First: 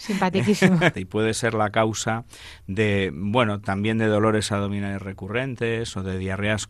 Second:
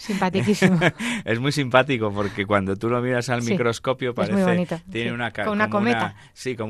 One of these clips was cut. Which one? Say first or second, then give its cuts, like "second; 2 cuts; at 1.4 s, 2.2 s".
first; 1 cut; at 0.9 s